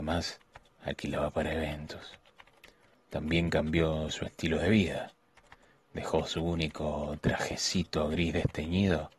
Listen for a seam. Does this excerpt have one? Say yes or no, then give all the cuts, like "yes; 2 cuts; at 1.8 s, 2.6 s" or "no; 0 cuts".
no; 0 cuts